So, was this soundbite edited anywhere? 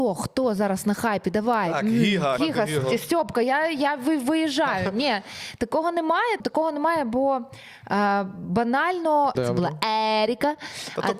yes; 3 cuts; at 2.4 s, 6.4 s, 9.3 s

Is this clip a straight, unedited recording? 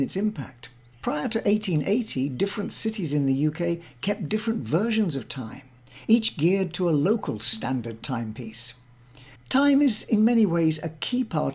no; 2 cuts; at 0.9 s, 9.4 s

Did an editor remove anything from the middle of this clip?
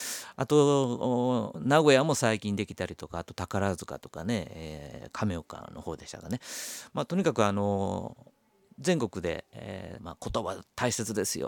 yes; 1 cut; at 10.0 s

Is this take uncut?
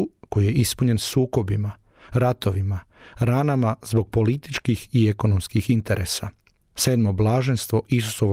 no; 1 cut; at 6.7 s

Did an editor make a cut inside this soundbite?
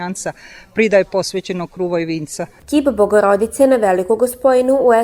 yes; 1 cut; at 2.6 s

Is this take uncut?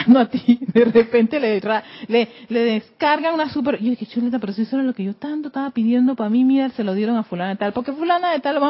yes; 0 cuts

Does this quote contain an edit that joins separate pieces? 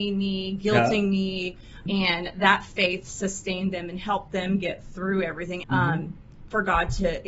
yes; 2 cuts; at 1.9 s, 5.6 s

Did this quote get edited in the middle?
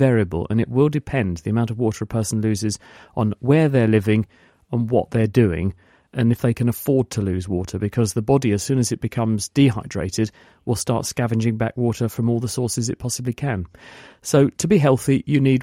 no; 0 cuts

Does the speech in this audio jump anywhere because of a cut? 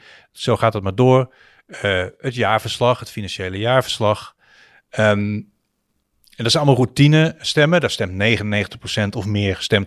no; 0 cuts

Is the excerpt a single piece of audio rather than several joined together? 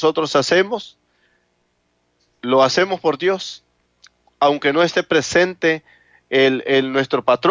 yes; 0 cuts

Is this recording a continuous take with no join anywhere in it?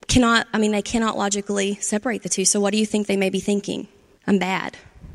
no; 1 cut; at 4.2 s

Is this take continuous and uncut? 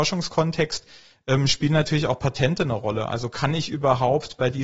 yes; 0 cuts

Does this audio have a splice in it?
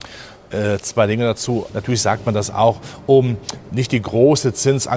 yes; 1 cut; at 1.7 s

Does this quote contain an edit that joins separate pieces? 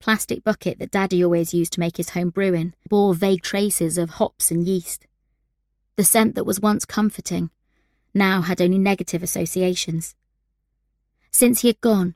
yes; 1 cut; at 2.9 s

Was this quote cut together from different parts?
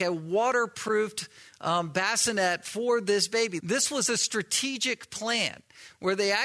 yes; 1 cut; at 3.6 s

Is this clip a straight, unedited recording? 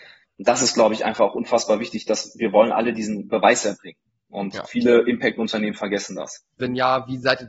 no; 1 cut; at 6.6 s

